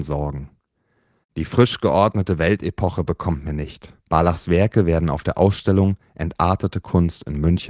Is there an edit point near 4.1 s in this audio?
yes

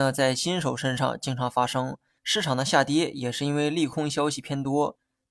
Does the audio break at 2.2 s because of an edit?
yes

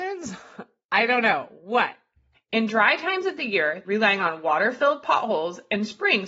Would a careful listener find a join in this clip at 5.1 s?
no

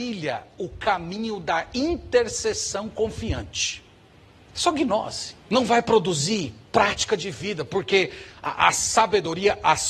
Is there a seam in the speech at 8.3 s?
no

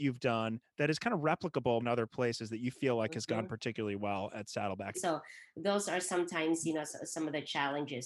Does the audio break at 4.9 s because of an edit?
yes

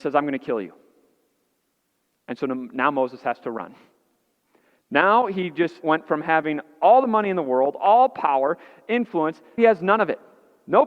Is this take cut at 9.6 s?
yes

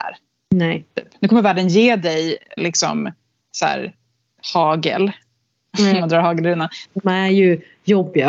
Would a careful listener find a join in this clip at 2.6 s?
yes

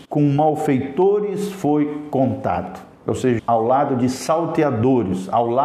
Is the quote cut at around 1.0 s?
no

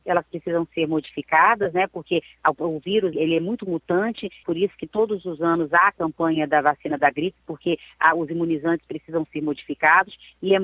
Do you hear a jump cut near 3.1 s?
yes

